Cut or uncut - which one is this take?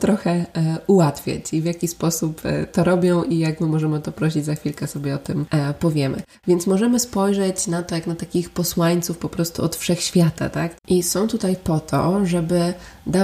cut